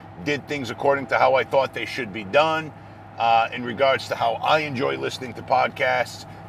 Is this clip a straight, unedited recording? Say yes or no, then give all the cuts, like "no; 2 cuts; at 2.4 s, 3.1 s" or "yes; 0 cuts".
yes; 0 cuts